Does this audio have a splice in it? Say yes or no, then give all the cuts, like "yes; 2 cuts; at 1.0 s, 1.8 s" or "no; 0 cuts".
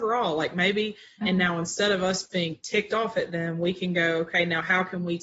yes; 1 cut; at 1.2 s